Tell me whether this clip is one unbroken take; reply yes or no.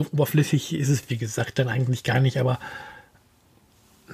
yes